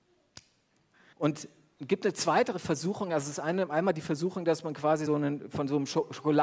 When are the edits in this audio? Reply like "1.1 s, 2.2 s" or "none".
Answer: 1.1 s, 5.1 s